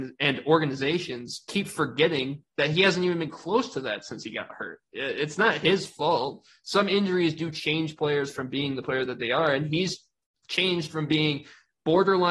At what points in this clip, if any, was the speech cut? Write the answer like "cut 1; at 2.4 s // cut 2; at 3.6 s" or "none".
none